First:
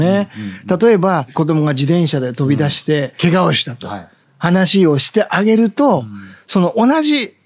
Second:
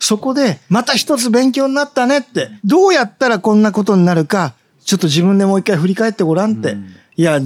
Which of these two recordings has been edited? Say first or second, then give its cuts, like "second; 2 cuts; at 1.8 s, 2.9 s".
first; 1 cut; at 4.2 s